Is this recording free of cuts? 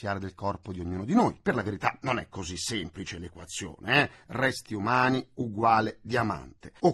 yes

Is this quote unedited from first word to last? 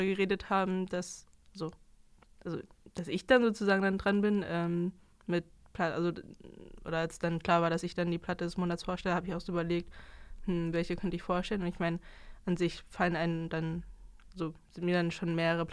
yes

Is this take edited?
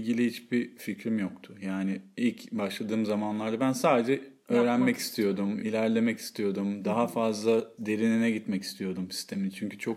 no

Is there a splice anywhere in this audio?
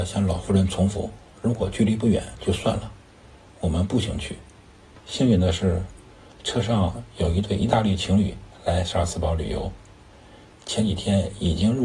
yes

